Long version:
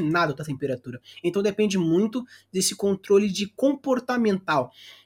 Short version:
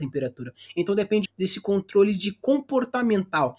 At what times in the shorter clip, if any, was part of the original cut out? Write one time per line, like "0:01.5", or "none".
0:01.3